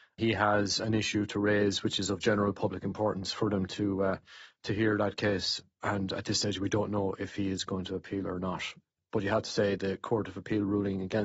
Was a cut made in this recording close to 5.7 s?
no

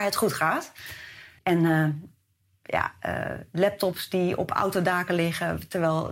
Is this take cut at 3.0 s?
no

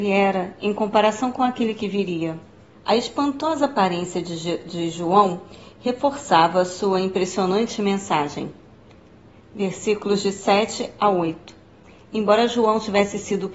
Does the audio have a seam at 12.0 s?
no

